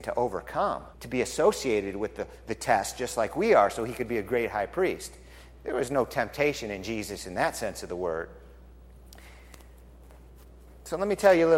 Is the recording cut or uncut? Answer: cut